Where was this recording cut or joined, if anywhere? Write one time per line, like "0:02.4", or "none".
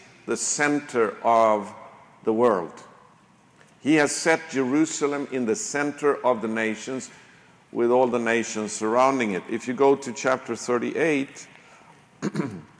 none